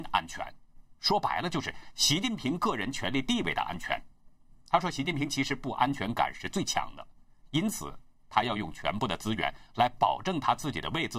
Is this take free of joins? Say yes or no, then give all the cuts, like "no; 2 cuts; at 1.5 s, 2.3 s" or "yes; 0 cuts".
yes; 0 cuts